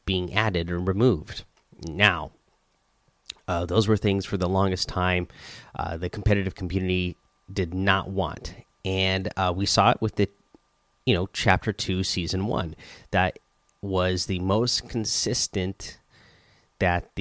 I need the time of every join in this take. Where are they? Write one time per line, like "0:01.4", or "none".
none